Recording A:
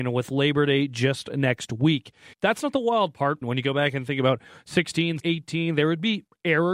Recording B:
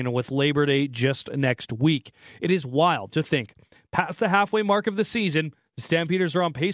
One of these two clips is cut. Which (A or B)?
A